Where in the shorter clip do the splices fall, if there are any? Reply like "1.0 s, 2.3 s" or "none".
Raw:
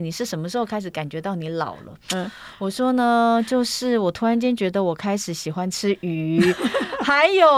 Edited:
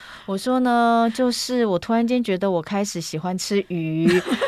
none